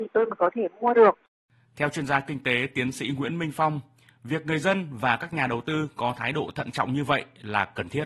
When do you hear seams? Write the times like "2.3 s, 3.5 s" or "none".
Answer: none